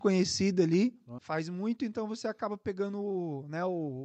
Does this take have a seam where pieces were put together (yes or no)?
yes